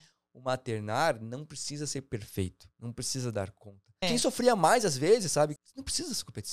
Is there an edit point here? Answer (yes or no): yes